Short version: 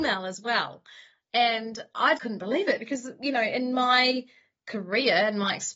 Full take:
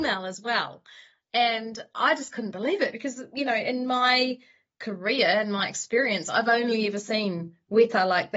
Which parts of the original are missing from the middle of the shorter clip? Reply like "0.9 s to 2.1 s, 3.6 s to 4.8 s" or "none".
2.2 s to 2.3 s

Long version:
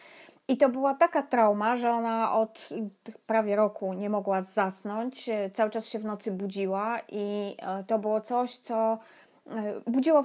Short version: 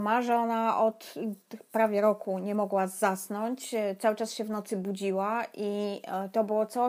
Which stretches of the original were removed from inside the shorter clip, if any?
none

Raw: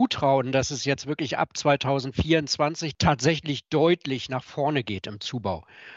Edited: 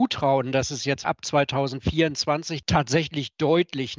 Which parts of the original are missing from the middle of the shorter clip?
1.0 s to 1.4 s

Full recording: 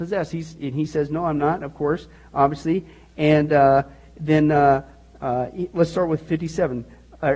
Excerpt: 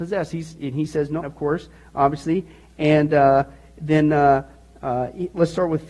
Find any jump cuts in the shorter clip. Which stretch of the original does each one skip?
1.2 s to 1.6 s

